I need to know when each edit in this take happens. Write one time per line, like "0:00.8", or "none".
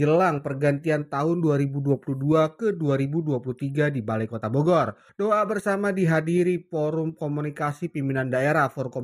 none